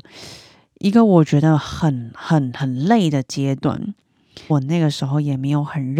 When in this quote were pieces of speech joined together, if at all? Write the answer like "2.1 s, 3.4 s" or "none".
4.5 s